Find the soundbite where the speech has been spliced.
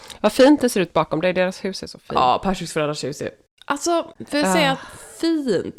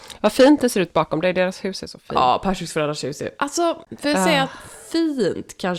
second; 1 cut; at 3.4 s

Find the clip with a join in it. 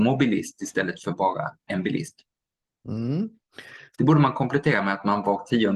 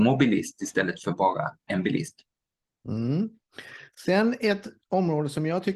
first; 1 cut; at 3.9 s

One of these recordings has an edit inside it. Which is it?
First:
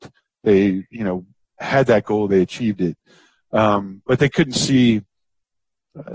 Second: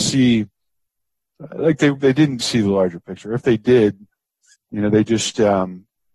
second; 1 cut; at 2.4 s

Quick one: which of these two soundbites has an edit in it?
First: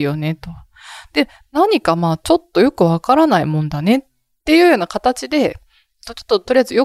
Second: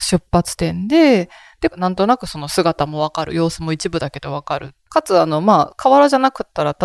second; 2 cuts; at 1.7 s, 4.9 s

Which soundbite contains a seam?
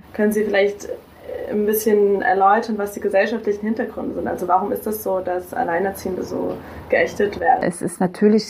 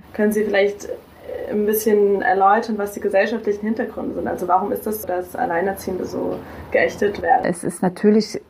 second; 1 cut; at 5.0 s

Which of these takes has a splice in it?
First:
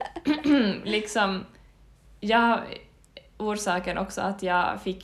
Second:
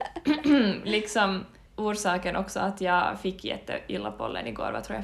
second; 1 cut; at 1.7 s

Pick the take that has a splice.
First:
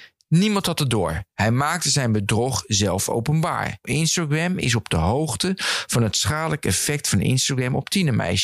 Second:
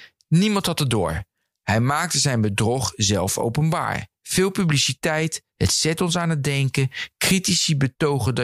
first; 2 cuts; at 1.3 s, 3.8 s

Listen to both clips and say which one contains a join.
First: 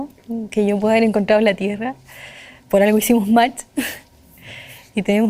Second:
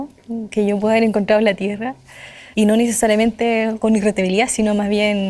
second; 1 cut; at 2.5 s

